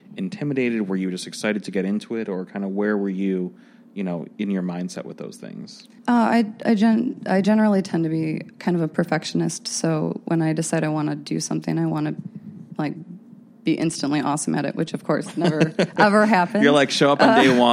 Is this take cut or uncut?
cut